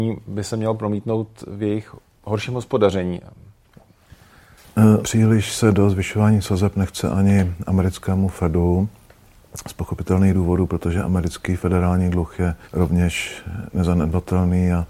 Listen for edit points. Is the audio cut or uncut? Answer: cut